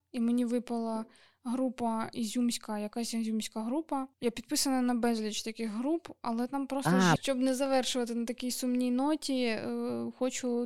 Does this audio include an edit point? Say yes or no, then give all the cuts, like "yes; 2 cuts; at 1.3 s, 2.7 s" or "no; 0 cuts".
yes; 2 cuts; at 4.1 s, 7.2 s